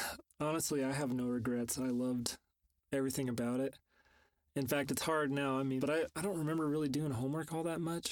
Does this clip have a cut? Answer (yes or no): yes